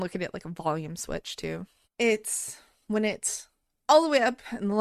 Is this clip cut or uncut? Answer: cut